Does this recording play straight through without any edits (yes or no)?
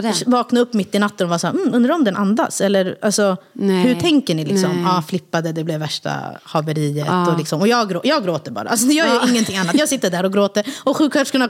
yes